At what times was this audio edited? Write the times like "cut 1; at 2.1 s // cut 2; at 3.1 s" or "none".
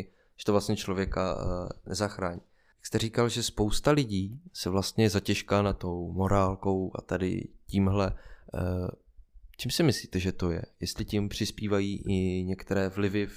none